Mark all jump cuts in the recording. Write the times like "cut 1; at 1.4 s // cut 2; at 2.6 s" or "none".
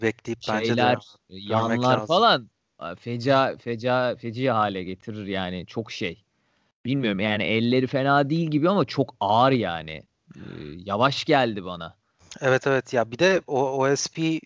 none